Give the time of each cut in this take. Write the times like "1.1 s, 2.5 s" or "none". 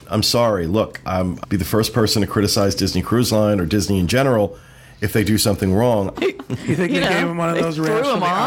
1.4 s, 6.1 s